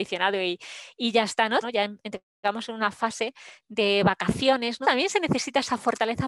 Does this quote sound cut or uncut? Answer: cut